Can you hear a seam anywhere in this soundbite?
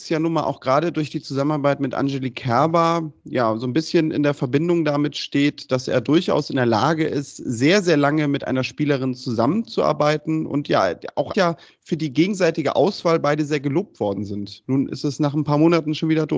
yes; 1 cut; at 11.3 s

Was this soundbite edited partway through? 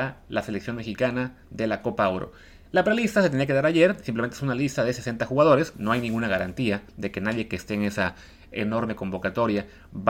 yes; 1 cut; at 5.7 s

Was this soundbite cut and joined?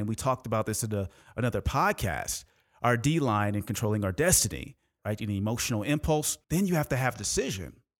yes; 2 cuts; at 5.0 s, 6.4 s

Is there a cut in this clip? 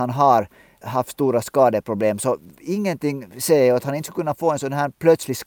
no; 0 cuts

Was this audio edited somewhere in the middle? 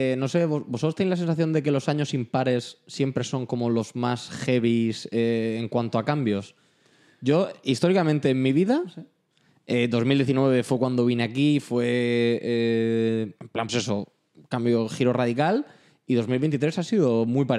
yes; 1 cut; at 13.7 s

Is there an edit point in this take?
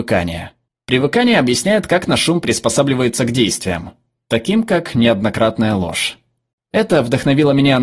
no; 0 cuts

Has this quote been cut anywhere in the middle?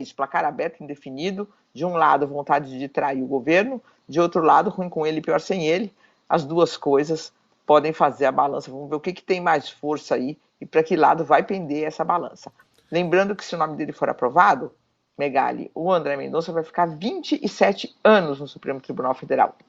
no; 0 cuts

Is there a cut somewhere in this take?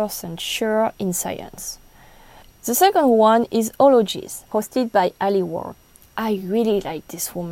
no; 0 cuts

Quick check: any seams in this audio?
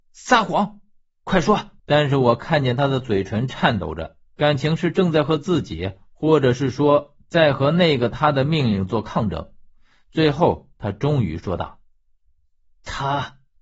yes; 1 cut; at 1.8 s

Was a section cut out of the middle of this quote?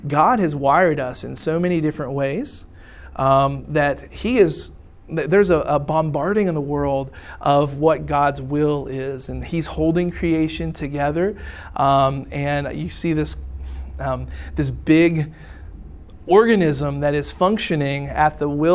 no; 0 cuts

